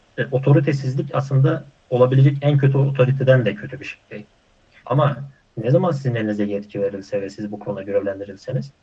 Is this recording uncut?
no; 1 cut; at 4.8 s

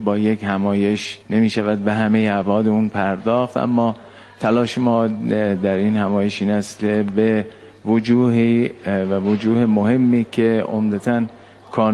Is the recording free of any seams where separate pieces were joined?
no; 1 cut; at 1.2 s

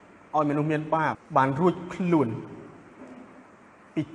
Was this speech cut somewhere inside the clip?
yes; 1 cut; at 1.1 s

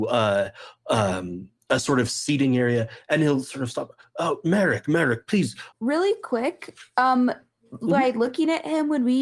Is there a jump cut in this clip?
yes; 1 cut; at 5.7 s

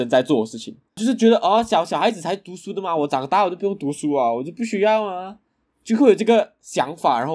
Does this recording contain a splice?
no; 0 cuts

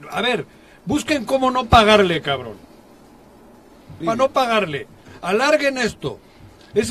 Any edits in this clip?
yes; 1 cut; at 4.0 s

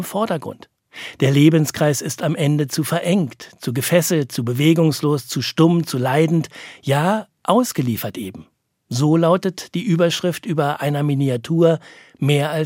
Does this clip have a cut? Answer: no; 0 cuts

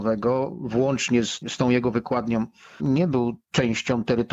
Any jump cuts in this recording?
yes; 2 cuts; at 1.4 s, 2.8 s

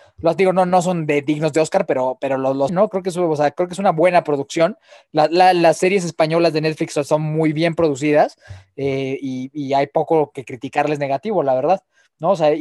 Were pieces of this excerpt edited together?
yes; 1 cut; at 2.7 s

